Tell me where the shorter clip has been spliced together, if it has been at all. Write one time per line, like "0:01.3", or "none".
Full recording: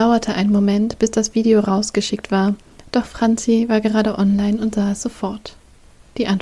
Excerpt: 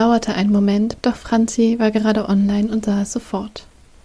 0:01.0